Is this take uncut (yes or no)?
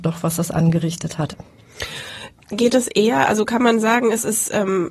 yes